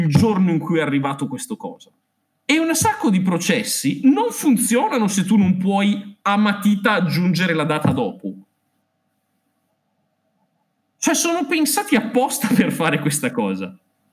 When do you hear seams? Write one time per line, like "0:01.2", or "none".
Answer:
none